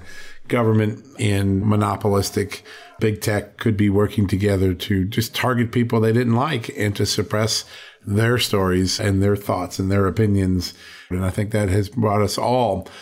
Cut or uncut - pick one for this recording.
cut